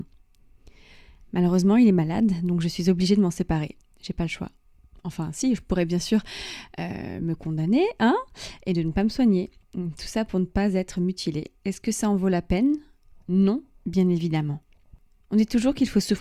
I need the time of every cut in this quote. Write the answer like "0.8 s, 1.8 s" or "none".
none